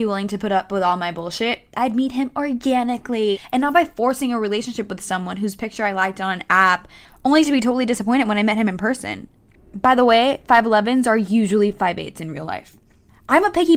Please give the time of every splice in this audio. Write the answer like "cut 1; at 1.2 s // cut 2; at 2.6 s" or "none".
none